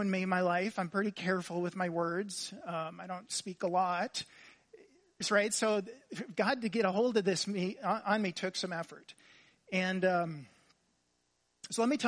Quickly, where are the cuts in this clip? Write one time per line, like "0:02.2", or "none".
none